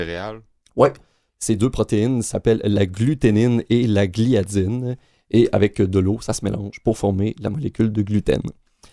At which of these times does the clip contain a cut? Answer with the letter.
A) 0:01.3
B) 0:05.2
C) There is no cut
A